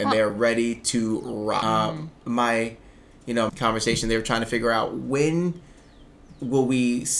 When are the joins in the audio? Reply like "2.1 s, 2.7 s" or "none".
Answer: 1.6 s, 3.5 s